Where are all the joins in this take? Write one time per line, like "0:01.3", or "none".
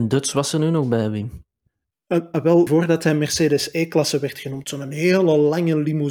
0:02.7